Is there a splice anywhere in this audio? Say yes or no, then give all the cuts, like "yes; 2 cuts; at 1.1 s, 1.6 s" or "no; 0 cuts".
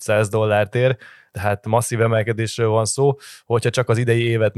no; 0 cuts